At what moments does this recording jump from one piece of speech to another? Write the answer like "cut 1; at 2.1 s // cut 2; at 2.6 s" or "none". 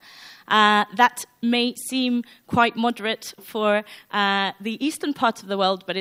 none